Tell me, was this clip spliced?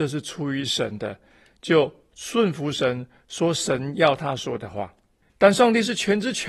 yes; 1 cut; at 5.3 s

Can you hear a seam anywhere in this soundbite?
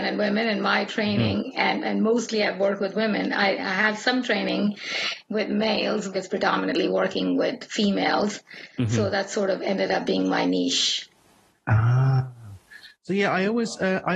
yes; 1 cut; at 6.1 s

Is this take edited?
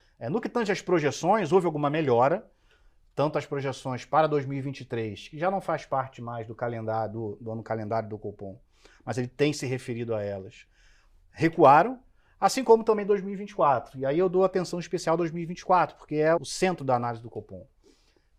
yes; 1 cut; at 16.4 s

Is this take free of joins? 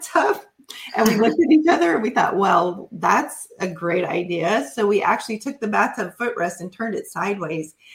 yes; 0 cuts

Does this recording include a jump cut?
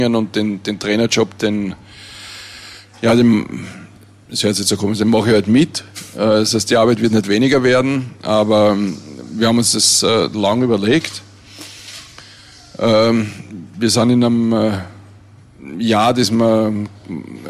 no; 0 cuts

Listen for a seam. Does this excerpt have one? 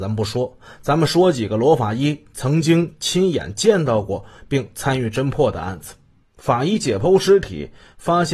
yes; 1 cut; at 6.2 s

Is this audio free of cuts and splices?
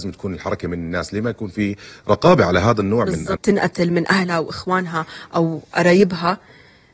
no; 1 cut; at 3.4 s

